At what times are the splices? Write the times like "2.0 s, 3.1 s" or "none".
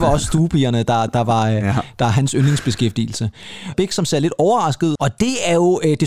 3.7 s, 5.0 s